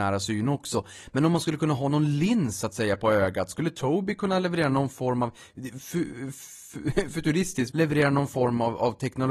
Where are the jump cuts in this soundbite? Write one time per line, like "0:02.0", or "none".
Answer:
0:07.7

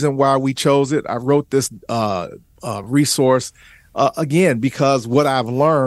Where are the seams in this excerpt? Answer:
none

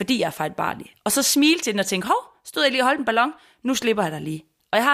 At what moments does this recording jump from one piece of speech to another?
none

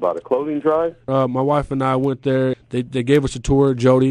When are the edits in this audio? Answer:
0:01.1
0:02.5

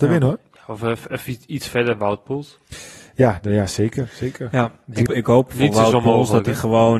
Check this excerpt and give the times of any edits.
0:05.1

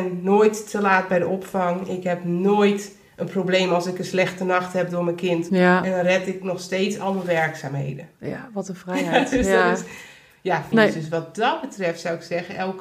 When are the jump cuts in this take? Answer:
0:05.5
0:10.7

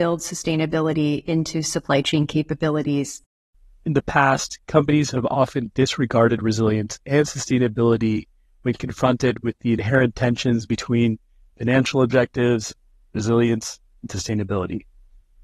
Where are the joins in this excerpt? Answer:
none

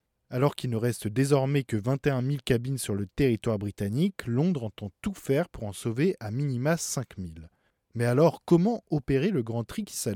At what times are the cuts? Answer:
none

